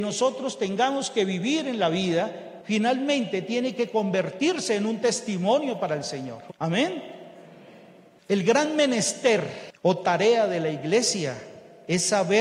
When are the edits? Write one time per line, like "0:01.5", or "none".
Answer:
0:06.5